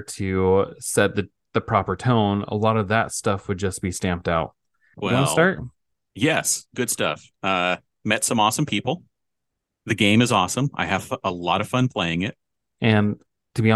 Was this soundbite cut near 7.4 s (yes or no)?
no